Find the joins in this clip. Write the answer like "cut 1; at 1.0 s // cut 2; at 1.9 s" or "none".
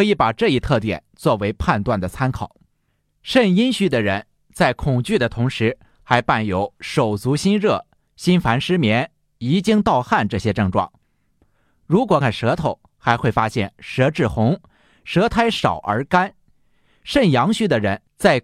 cut 1; at 12.2 s